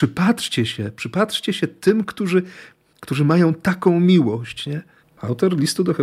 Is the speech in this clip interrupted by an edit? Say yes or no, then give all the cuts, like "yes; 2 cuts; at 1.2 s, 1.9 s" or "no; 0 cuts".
yes; 1 cut; at 5.0 s